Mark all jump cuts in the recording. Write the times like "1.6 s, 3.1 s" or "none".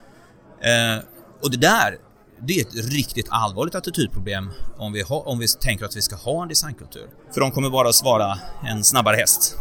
7.2 s